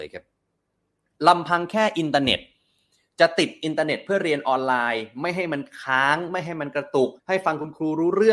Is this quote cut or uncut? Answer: cut